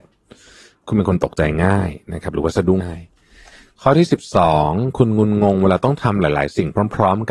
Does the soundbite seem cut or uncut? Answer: cut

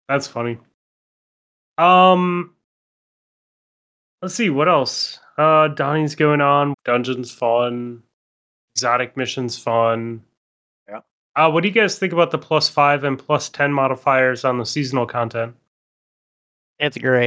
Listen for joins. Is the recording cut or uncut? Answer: cut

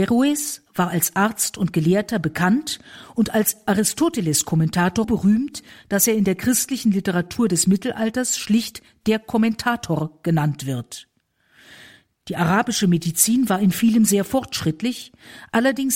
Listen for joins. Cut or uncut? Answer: cut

